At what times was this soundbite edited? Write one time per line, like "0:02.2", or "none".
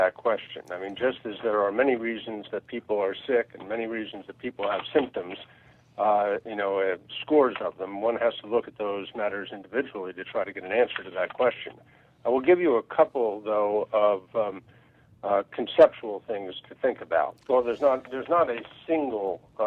0:17.4